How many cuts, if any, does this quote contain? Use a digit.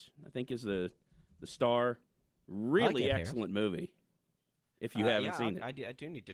0